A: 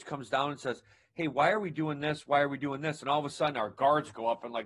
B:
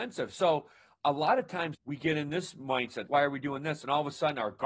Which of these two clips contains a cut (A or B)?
B